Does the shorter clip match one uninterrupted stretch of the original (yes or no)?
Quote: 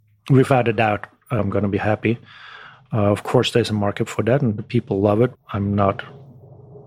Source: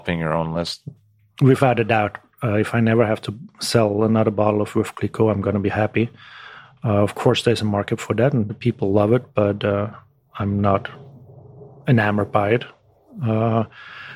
no